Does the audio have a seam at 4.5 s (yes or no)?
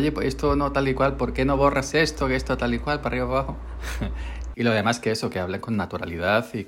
yes